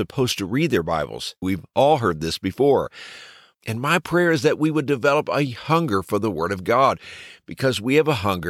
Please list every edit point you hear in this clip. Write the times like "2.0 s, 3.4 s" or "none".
1.4 s, 3.5 s

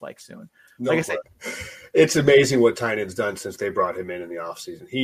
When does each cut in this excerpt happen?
1.2 s

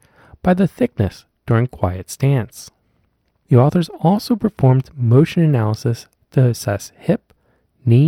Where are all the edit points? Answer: none

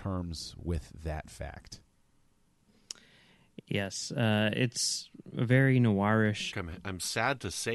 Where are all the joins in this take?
6.5 s

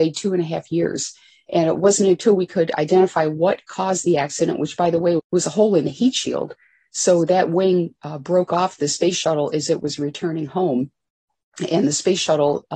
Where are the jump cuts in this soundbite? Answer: 5.2 s

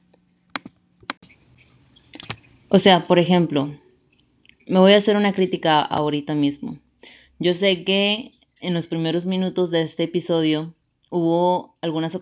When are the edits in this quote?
none

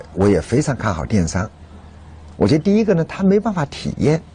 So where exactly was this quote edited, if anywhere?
2.3 s

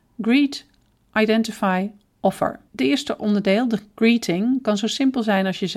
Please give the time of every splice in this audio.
2.7 s

